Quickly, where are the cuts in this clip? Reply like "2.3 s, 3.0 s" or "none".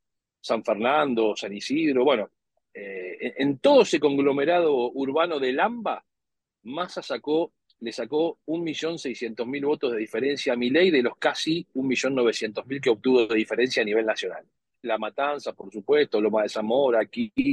14.8 s